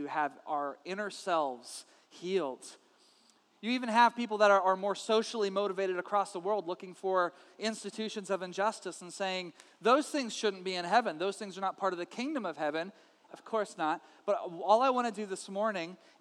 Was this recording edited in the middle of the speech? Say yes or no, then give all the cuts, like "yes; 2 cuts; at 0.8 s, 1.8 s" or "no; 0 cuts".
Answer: yes; 1 cut; at 13.3 s